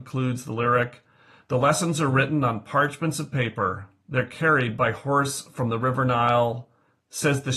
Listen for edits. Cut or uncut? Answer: uncut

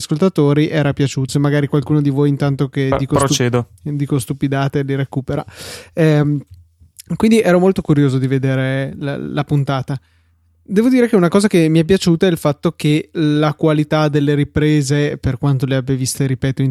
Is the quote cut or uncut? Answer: cut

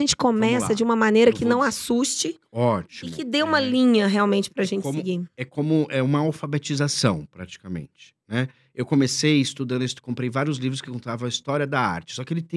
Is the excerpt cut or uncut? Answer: uncut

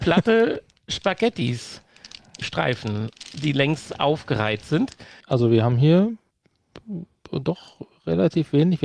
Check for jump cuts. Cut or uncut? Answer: cut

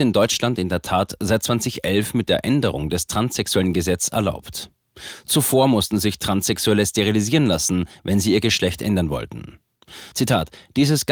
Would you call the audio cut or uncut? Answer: cut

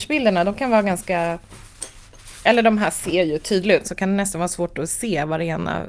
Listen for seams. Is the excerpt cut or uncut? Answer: cut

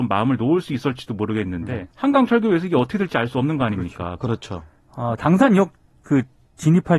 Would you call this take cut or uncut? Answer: cut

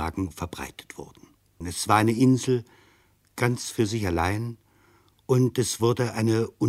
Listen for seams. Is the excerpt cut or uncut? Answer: cut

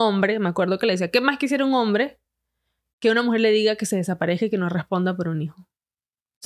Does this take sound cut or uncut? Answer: uncut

